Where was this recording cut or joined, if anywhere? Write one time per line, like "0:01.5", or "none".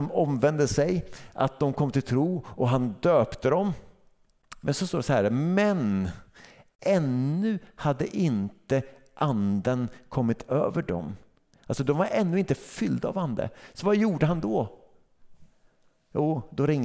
none